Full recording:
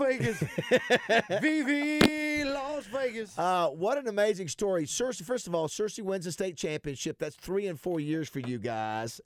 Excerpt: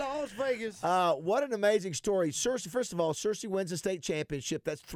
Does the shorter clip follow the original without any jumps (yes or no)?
yes